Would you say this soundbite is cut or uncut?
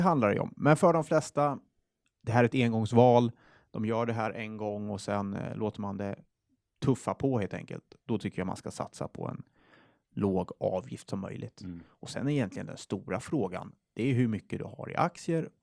uncut